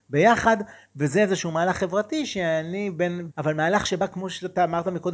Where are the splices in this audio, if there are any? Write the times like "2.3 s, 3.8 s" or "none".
3.3 s